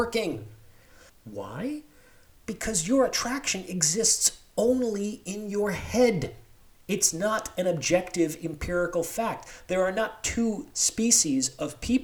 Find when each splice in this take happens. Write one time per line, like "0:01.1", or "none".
0:01.1

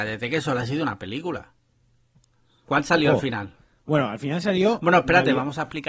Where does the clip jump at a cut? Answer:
0:02.6

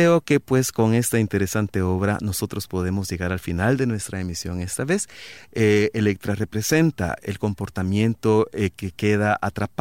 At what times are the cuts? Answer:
0:05.4

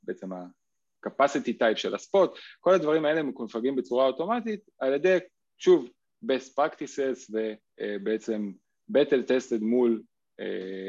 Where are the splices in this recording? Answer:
none

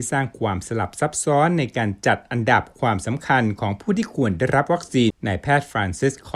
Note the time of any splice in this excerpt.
0:05.1

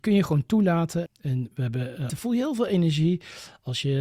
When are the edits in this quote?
0:01.1
0:02.1

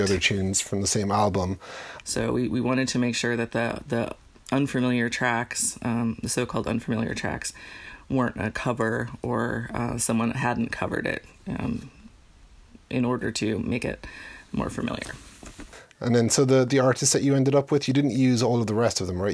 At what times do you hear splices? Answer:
0:02.0

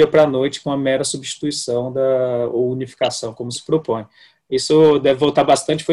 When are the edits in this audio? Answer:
none

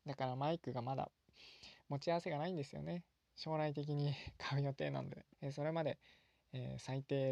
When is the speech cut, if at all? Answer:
0:03.2
0:05.3

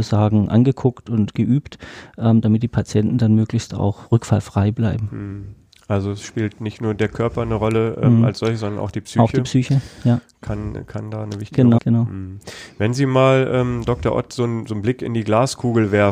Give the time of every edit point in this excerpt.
0:11.8

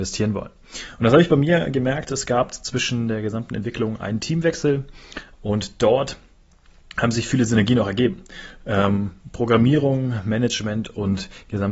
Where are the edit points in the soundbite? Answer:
0:05.3

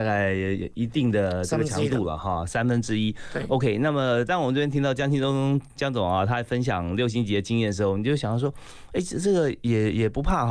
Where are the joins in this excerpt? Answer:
none

